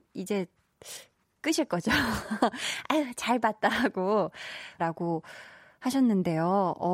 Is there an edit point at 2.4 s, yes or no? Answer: no